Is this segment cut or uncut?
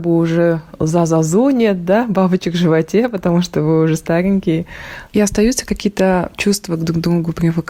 cut